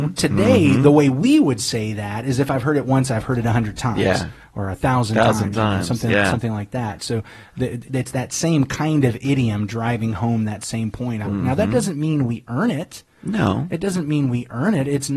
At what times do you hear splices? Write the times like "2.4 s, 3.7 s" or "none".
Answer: 7.8 s, 11.2 s